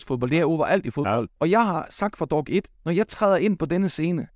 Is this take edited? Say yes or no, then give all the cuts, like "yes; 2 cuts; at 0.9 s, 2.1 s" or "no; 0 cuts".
yes; 2 cuts; at 1.3 s, 2.7 s